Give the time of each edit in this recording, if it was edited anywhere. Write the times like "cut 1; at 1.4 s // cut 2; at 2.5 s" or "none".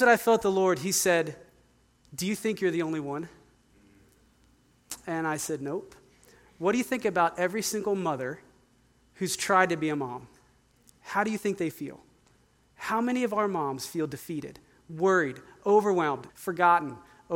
cut 1; at 16.3 s

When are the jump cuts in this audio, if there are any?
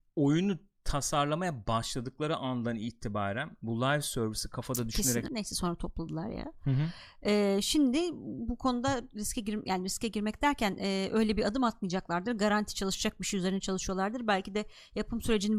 cut 1; at 5.3 s

